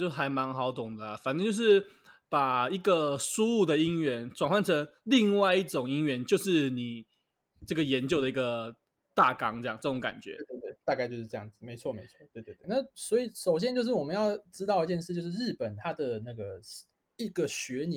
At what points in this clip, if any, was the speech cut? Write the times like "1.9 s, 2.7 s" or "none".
12.6 s